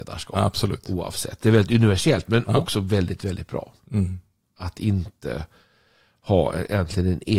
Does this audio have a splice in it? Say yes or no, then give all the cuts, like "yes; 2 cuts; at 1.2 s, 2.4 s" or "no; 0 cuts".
yes; 1 cut; at 3.8 s